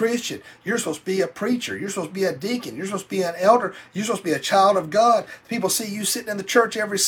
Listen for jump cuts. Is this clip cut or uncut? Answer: uncut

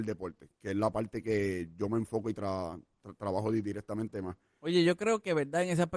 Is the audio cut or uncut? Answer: uncut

